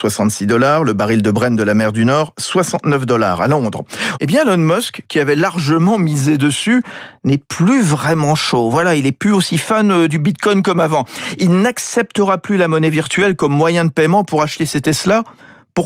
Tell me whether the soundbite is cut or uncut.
cut